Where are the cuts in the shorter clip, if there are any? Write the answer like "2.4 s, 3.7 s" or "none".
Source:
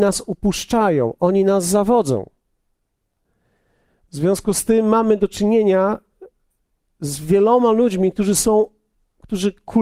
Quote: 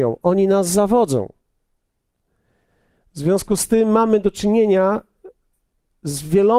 none